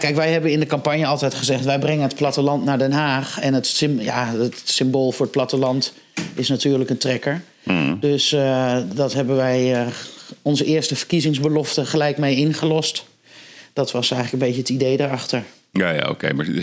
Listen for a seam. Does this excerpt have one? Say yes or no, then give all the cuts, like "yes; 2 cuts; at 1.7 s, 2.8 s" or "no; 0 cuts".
no; 0 cuts